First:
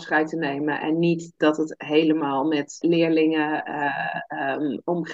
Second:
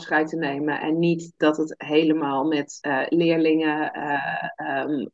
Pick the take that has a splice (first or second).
first